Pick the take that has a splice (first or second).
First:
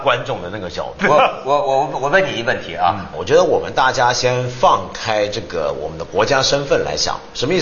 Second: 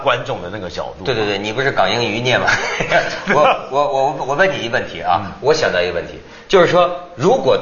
first